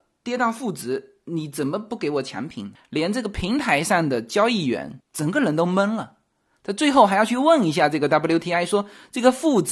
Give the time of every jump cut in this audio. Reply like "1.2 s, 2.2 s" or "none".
2.8 s